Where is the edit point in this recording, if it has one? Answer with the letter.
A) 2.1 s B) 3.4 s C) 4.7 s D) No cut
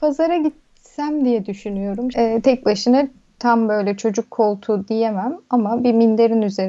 A